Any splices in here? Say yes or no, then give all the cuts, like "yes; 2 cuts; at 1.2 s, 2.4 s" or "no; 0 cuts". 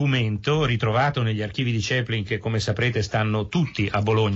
no; 0 cuts